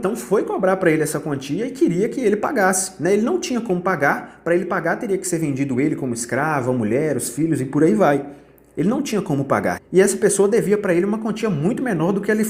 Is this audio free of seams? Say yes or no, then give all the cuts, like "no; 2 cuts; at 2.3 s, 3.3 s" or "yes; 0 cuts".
no; 1 cut; at 9.8 s